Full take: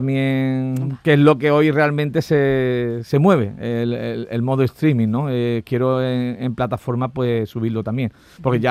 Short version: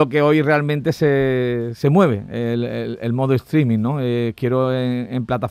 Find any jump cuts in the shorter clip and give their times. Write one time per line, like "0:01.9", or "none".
none